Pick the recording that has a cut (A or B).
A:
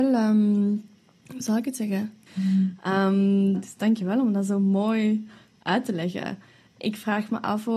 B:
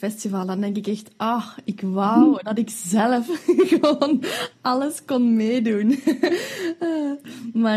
A